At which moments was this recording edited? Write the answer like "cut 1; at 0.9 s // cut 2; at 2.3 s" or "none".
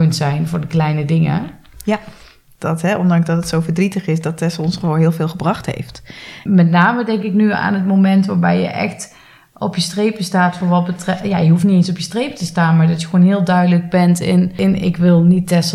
cut 1; at 6.5 s